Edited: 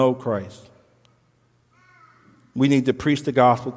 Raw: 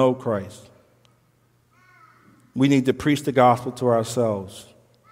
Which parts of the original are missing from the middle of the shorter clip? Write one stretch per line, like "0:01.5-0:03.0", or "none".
none

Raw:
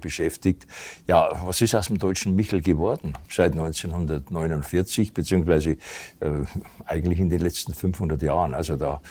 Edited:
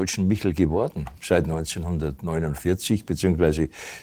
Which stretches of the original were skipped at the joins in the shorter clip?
none

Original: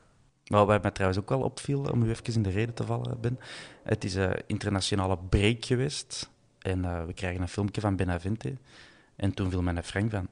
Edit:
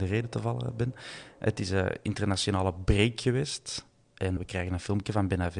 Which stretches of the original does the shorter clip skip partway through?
0:06.8-0:07.1

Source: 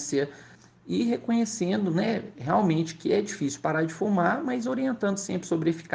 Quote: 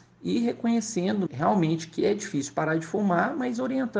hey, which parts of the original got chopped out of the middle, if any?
0:01.9-0:02.3

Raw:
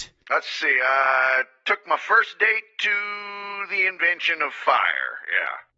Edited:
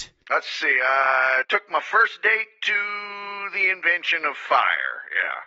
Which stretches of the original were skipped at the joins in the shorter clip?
0:01.4-0:01.6

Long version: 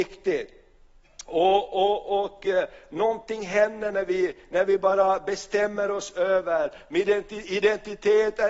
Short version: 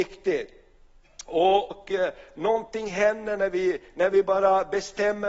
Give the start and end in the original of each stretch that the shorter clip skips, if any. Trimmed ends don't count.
0:01.7-0:02.3

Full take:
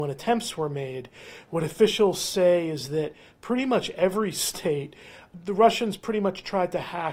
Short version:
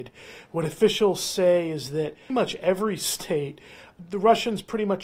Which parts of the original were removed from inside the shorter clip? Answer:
0:03.3-0:03.6

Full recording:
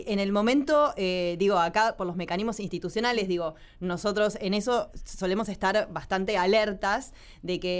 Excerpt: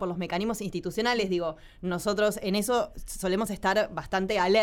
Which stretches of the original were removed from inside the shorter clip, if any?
none

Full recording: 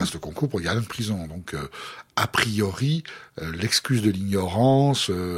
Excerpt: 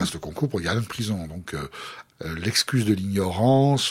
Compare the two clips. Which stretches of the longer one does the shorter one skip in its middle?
0:02.1-0:03.3

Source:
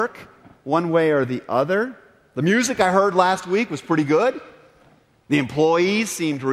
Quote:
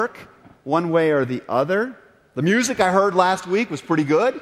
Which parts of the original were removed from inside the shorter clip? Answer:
none

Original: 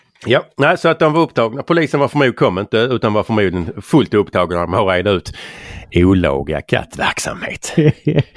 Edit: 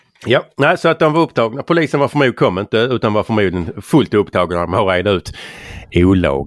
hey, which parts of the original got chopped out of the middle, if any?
none

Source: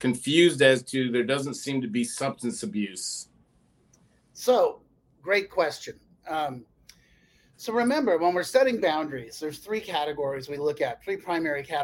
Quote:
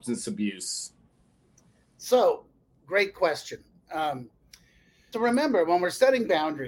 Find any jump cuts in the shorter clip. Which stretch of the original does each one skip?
0:07.5-0:07.7

